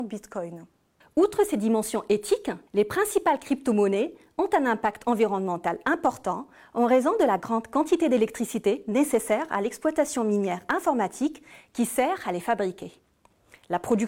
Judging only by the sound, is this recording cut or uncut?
cut